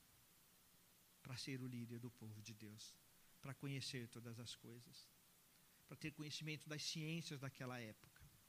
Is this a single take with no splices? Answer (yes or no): yes